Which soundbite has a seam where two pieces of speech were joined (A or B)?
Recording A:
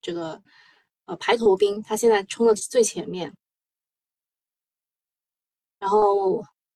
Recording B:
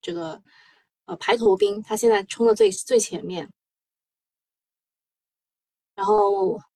A